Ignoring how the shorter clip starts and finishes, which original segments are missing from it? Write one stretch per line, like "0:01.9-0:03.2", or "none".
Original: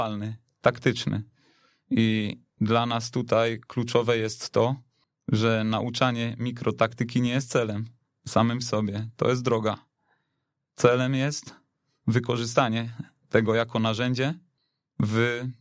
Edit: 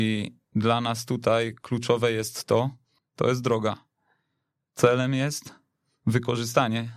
0:05.2-0:09.2